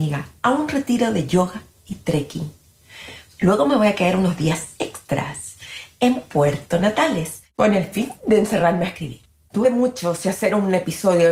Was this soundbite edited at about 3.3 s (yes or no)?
yes